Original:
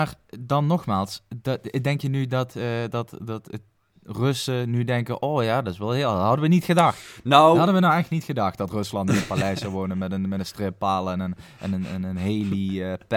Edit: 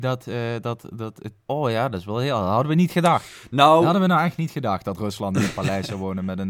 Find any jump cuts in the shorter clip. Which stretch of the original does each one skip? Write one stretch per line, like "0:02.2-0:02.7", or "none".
0:03.8-0:05.2

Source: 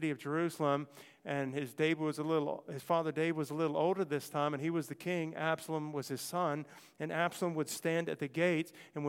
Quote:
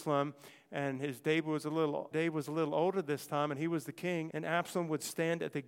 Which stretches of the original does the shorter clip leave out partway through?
0:02.6-0:03.1
0:05.3-0:07.0

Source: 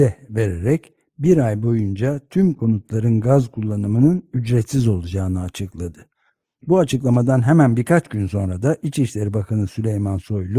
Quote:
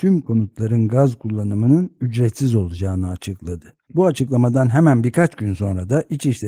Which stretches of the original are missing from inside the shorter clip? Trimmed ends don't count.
0:06.2-0:06.6

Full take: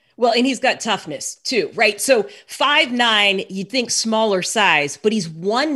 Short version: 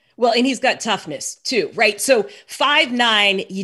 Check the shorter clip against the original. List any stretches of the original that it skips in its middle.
none

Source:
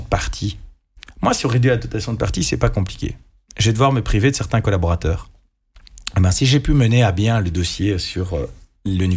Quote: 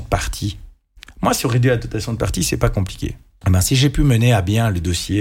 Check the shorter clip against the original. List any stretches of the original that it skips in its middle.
0:03.4-0:06.1

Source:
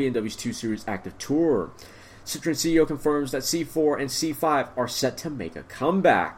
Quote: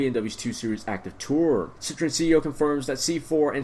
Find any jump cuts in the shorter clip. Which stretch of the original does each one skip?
0:01.8-0:02.2

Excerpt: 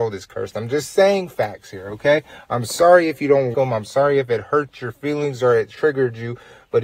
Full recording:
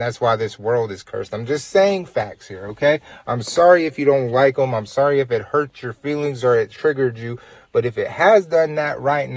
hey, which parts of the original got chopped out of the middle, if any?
0:04.3-0:04.5

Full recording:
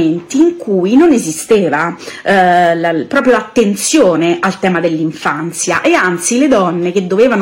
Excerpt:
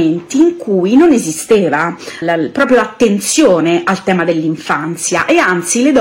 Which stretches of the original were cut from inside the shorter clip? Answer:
0:02.2-0:02.8

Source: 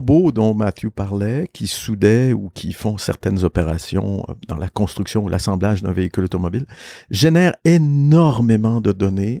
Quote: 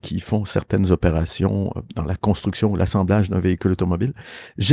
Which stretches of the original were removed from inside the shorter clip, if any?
none

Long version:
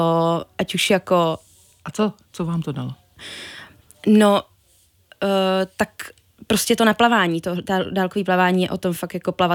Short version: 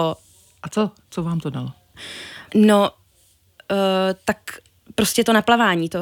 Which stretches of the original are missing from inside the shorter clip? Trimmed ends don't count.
0:03.7-0:04.0

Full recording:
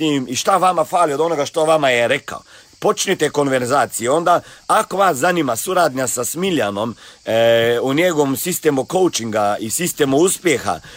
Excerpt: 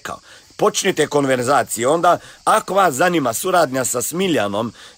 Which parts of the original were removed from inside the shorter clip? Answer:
none

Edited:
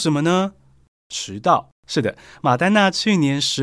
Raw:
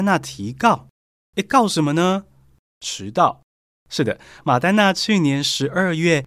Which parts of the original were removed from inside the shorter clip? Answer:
0:03.5-0:03.8

